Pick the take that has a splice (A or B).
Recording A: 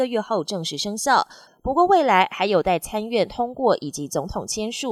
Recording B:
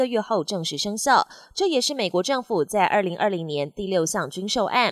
A